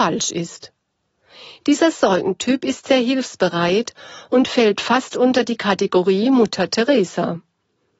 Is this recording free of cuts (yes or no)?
yes